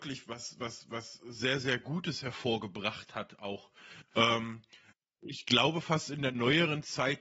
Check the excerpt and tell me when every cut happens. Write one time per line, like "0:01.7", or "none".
none